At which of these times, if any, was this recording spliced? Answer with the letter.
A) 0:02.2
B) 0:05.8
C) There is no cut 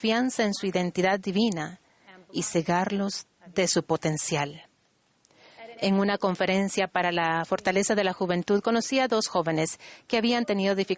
C